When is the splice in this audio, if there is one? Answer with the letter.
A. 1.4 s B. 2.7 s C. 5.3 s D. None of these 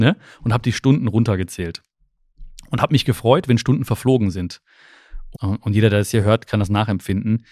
C